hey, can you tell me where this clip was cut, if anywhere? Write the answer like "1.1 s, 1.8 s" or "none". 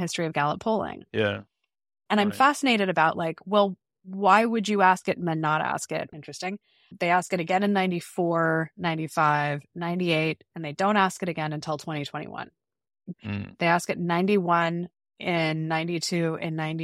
6.1 s, 13.1 s